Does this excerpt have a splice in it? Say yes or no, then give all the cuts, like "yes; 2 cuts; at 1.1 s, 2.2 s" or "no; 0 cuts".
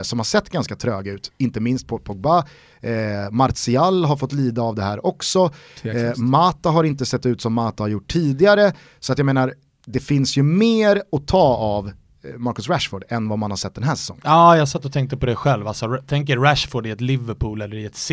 no; 0 cuts